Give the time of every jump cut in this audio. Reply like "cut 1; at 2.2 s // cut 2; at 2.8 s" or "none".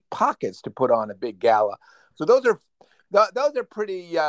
cut 1; at 2.1 s